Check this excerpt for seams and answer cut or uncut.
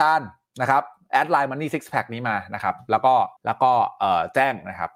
cut